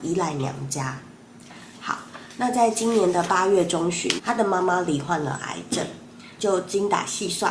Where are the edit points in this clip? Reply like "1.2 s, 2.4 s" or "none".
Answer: 4.2 s, 6.4 s